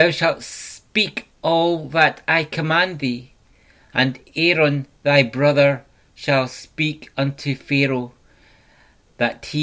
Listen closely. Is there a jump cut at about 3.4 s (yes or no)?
no